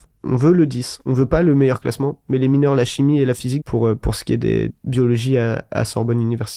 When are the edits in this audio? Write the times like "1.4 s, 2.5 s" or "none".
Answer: 3.6 s, 4.7 s